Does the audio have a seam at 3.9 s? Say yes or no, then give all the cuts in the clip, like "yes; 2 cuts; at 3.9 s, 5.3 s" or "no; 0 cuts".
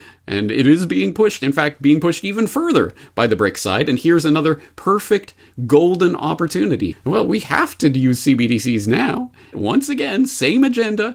no; 2 cuts; at 6.9 s, 9.5 s